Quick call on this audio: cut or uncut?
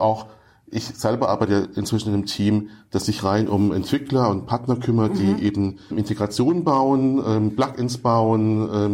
cut